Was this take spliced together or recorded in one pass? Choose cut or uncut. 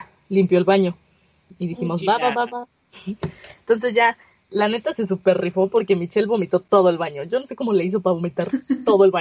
uncut